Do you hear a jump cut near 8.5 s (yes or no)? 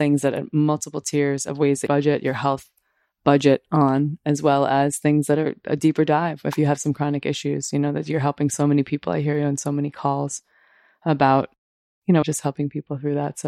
no